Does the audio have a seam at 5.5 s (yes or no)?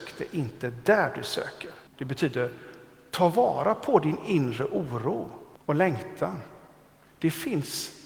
yes